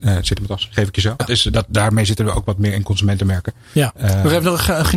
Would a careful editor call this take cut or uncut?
cut